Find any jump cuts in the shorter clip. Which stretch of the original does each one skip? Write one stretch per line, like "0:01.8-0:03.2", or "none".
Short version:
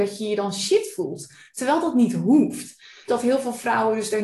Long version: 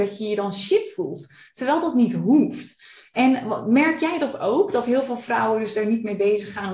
0:03.1-0:04.7